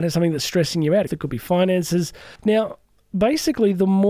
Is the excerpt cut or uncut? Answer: cut